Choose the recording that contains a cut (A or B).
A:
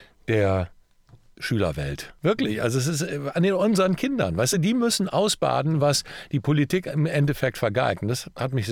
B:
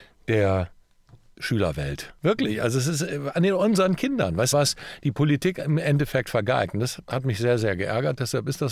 B